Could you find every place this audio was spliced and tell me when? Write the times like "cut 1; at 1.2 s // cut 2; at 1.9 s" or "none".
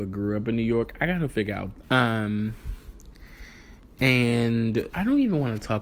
cut 1; at 1.8 s // cut 2; at 4.9 s